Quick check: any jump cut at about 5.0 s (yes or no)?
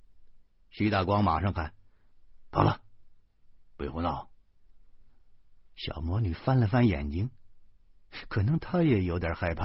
no